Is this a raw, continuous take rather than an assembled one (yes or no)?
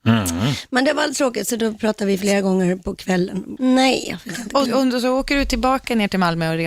no